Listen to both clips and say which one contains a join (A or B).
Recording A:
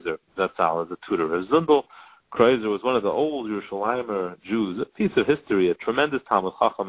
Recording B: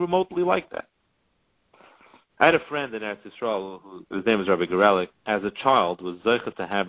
B